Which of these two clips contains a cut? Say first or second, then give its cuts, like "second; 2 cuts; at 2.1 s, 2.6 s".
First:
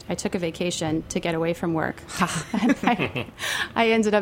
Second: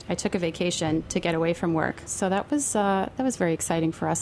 second; 1 cut; at 2.1 s